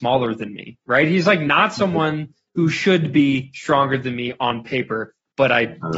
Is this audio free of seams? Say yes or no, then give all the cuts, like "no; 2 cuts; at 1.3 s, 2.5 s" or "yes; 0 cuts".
yes; 0 cuts